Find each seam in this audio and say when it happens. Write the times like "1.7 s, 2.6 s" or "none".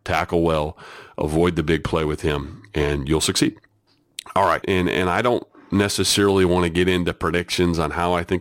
4.6 s

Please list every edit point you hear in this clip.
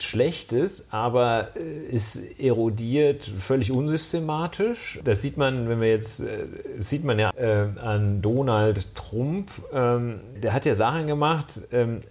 5.0 s, 7.3 s, 10.4 s

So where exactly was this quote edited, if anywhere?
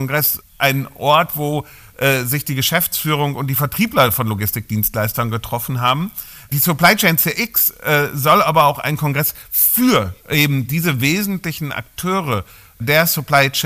10.2 s

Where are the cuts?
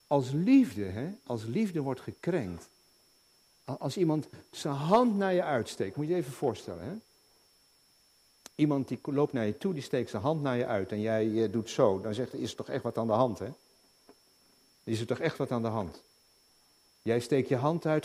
16.9 s

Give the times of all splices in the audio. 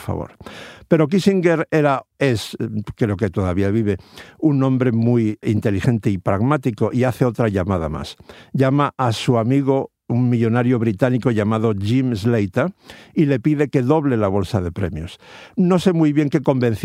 5.4 s

